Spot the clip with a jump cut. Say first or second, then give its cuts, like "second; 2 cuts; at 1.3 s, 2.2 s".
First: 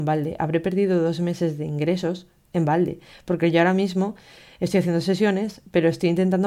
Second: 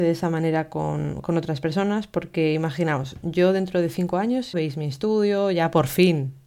second; 1 cut; at 4.5 s